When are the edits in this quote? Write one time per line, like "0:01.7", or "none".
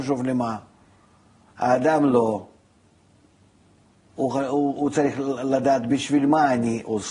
none